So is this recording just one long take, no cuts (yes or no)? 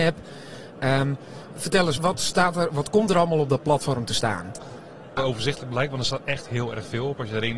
no